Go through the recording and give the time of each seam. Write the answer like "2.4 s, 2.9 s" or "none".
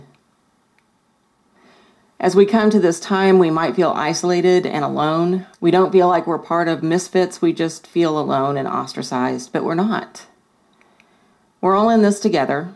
5.5 s